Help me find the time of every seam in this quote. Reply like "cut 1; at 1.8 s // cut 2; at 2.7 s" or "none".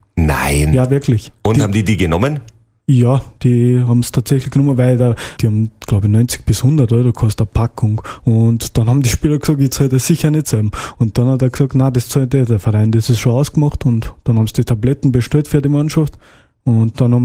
cut 1; at 5.4 s